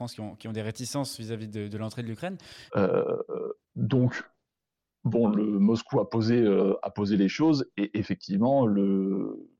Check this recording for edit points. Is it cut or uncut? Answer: cut